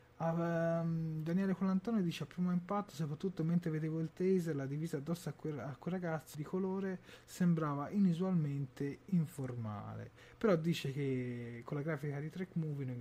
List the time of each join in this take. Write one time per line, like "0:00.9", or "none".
0:06.3